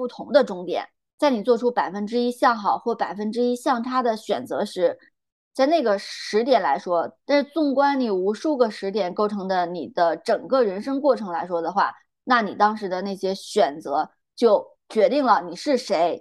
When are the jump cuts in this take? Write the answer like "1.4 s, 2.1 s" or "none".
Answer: 7.2 s